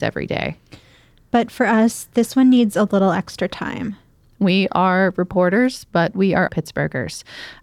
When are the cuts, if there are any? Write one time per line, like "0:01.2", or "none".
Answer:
0:06.5